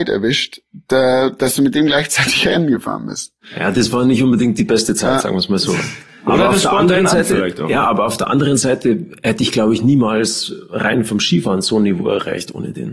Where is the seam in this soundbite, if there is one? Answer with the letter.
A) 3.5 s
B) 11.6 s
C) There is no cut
C